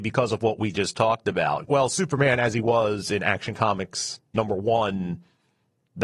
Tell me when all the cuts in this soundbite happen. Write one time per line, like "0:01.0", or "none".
0:01.7

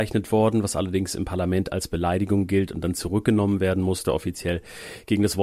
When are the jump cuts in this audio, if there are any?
none

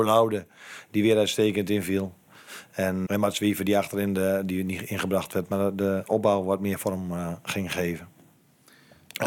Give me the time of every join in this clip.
0:03.1

